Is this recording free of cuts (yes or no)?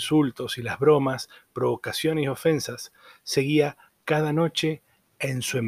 yes